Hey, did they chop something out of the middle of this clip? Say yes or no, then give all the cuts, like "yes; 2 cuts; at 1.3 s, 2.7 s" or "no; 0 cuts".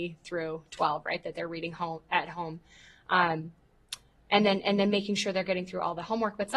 no; 0 cuts